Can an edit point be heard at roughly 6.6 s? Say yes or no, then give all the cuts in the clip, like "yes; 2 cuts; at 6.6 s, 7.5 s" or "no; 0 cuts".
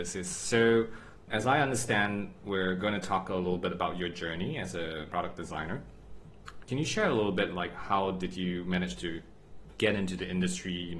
yes; 1 cut; at 6.6 s